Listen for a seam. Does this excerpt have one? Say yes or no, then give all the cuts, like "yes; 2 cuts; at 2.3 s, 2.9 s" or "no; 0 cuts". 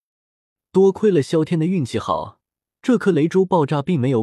no; 0 cuts